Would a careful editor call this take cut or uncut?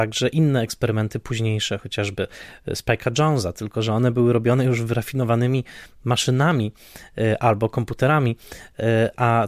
uncut